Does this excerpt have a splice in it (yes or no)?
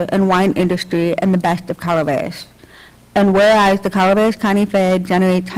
no